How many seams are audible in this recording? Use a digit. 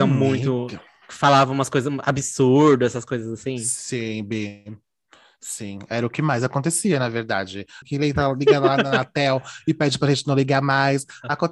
1